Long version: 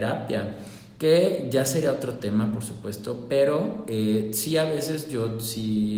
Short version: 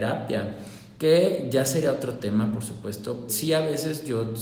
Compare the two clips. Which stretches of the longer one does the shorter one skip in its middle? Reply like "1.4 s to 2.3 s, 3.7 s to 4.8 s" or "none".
3.3 s to 4.3 s